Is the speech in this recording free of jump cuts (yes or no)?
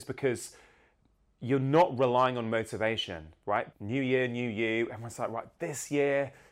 no